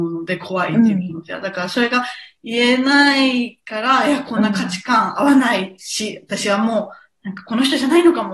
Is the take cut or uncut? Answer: uncut